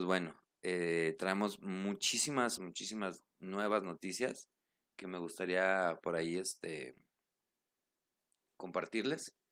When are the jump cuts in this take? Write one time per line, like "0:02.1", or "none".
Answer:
0:02.6